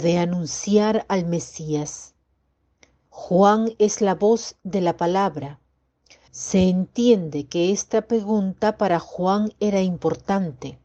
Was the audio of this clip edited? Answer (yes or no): yes